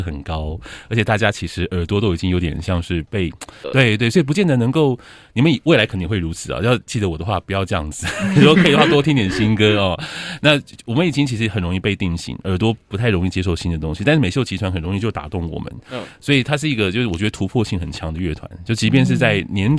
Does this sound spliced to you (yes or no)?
yes